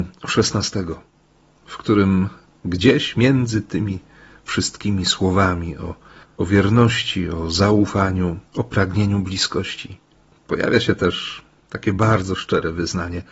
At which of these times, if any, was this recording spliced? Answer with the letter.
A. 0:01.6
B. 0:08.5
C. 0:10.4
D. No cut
B